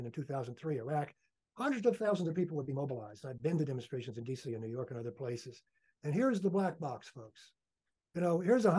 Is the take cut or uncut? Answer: uncut